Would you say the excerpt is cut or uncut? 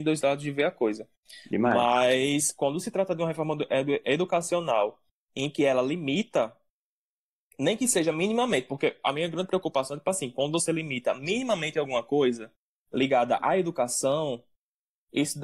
uncut